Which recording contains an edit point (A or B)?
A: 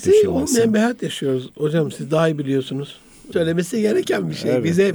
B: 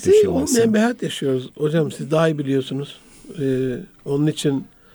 A